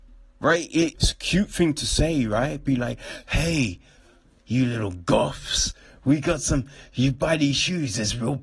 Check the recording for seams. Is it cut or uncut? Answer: cut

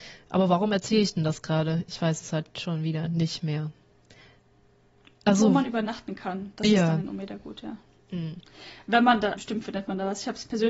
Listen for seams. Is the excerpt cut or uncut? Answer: cut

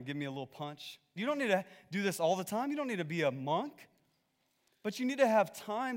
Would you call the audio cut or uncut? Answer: cut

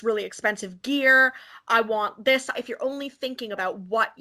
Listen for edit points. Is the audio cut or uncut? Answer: cut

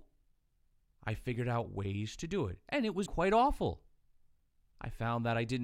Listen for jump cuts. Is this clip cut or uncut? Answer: cut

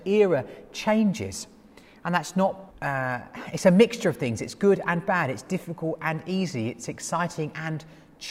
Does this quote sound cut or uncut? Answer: cut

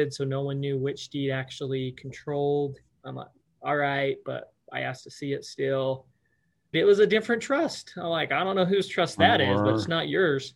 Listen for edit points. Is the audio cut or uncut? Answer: cut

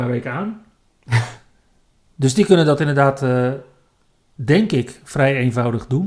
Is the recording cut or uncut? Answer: uncut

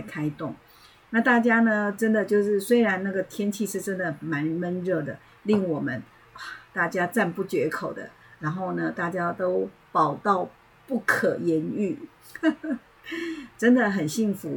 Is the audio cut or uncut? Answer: cut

